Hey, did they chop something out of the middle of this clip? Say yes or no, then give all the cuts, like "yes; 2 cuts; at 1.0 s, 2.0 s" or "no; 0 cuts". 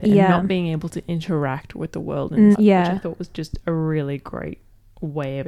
yes; 1 cut; at 2.5 s